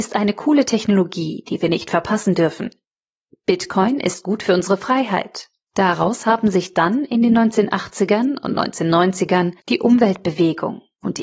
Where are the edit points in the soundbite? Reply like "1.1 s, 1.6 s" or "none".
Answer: 5.7 s, 9.6 s